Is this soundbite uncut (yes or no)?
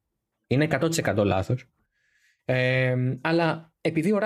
yes